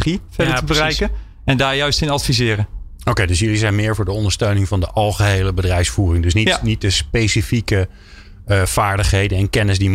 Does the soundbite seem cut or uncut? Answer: uncut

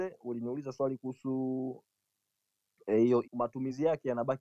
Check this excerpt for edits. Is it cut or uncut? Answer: cut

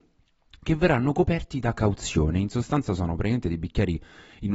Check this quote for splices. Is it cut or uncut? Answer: uncut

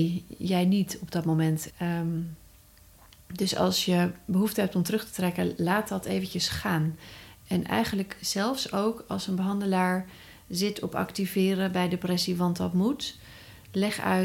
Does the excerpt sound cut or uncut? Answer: cut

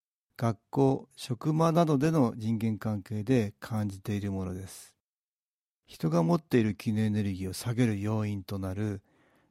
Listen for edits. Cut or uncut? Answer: uncut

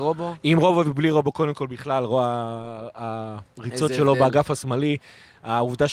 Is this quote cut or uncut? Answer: uncut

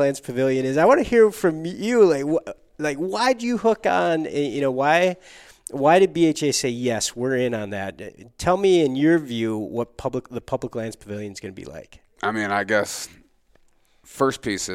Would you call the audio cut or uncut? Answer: uncut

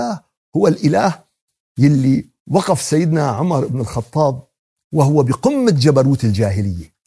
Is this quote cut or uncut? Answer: uncut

